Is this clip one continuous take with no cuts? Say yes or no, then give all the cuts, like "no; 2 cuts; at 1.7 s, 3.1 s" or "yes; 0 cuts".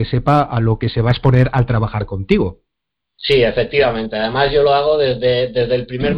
yes; 0 cuts